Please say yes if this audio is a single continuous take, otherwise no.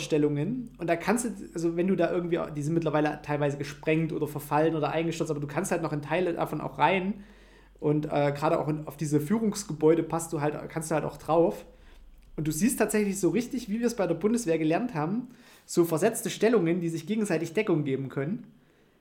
yes